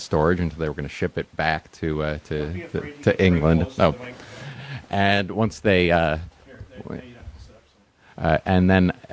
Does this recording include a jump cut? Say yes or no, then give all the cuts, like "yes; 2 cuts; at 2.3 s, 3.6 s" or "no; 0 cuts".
no; 0 cuts